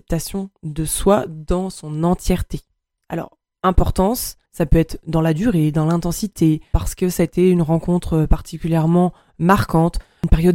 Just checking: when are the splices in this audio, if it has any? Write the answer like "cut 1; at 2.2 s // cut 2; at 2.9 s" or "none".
cut 1; at 3.0 s // cut 2; at 4.5 s